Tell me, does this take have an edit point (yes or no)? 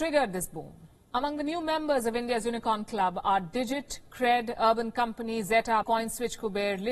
yes